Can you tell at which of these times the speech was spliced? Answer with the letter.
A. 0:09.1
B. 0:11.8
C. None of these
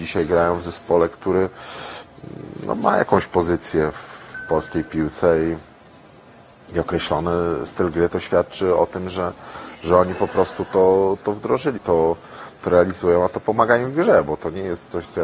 B